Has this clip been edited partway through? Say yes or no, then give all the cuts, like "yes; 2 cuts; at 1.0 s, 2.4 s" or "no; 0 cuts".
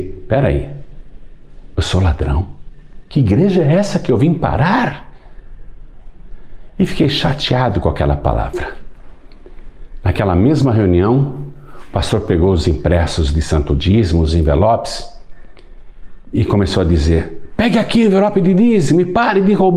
yes; 1 cut; at 1.7 s